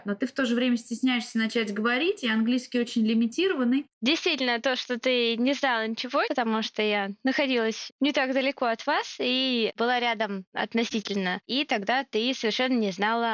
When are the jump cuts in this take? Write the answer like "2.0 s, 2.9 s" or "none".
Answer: 3.9 s, 6.2 s, 11.4 s